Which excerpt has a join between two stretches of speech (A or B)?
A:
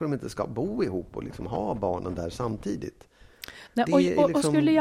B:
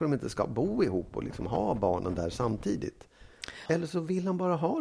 B